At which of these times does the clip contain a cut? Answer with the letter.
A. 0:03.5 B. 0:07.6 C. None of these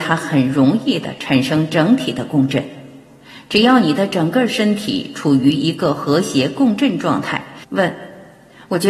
B